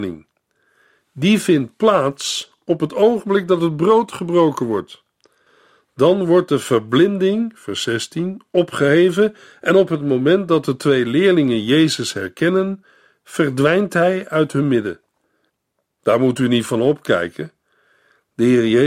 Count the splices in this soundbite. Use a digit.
0